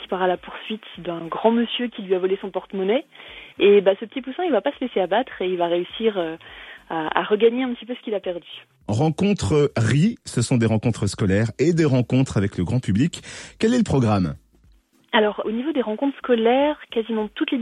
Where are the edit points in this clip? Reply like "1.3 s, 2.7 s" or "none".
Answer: 3.5 s, 15.4 s